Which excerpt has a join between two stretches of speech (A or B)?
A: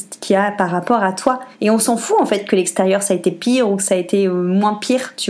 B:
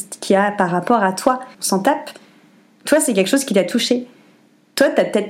B